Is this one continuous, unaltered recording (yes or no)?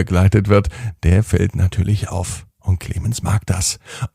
no